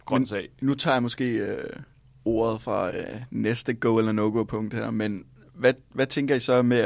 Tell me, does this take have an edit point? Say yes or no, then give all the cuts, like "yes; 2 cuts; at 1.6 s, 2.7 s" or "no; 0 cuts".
no; 0 cuts